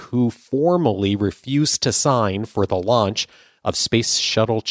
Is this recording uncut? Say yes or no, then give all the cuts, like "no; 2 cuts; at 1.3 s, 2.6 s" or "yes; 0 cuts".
yes; 0 cuts